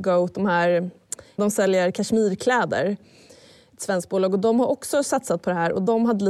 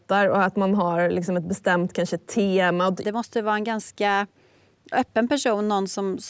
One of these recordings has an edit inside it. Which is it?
second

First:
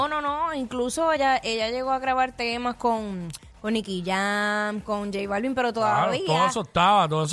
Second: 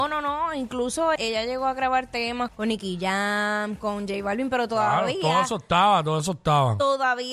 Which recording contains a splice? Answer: second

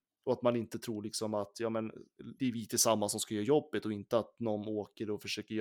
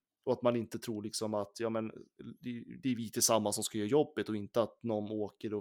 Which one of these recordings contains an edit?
first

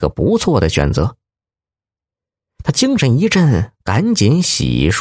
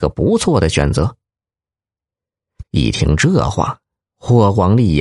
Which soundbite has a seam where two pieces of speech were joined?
second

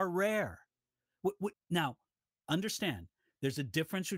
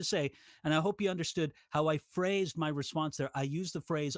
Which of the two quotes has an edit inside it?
first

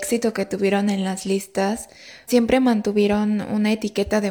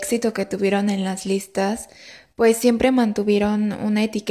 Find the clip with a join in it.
first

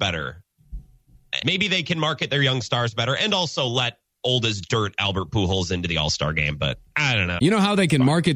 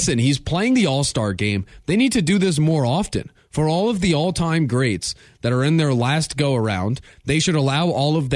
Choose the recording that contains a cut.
first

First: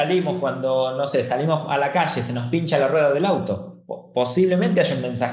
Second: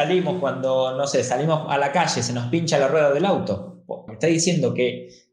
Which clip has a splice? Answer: second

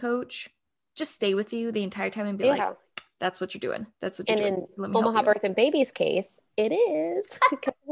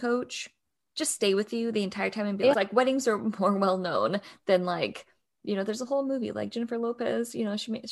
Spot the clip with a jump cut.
second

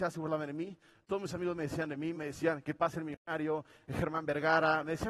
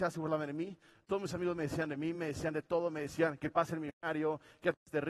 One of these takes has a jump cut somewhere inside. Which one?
first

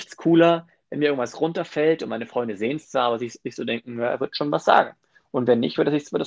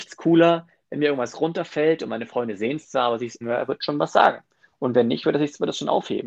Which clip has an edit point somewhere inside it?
second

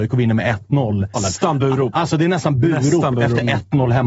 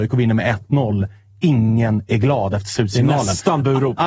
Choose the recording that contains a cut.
first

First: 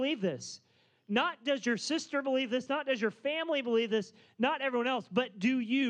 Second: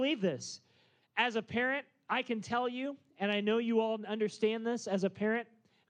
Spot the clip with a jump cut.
second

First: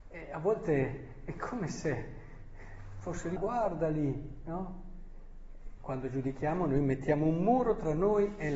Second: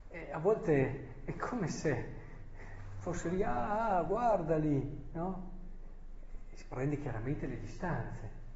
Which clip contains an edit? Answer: first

